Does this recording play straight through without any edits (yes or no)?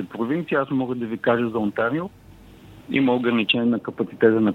no